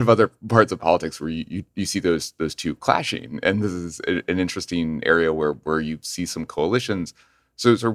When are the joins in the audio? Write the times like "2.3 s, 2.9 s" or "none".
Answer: none